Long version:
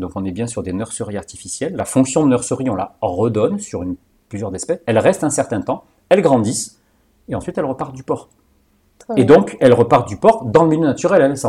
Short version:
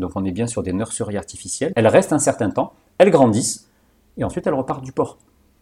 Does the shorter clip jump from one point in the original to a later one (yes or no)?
yes